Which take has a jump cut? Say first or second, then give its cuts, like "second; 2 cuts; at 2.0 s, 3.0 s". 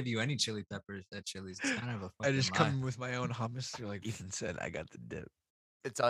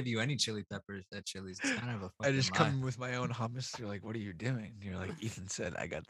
first; 1 cut; at 4.0 s